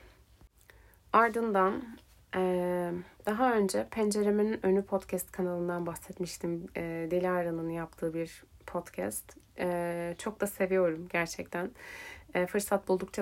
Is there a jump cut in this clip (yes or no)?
yes